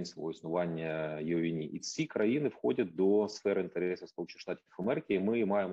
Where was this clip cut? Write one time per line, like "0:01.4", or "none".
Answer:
none